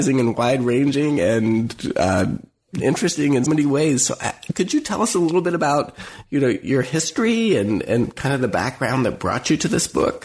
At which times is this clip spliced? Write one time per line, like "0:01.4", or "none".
0:03.5